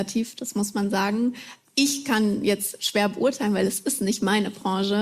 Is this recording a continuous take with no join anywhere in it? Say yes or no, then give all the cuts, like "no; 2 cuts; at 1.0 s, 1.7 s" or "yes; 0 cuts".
yes; 0 cuts